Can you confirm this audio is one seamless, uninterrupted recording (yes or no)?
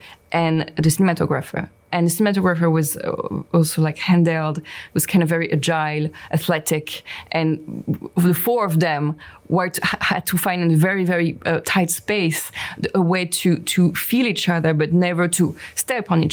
yes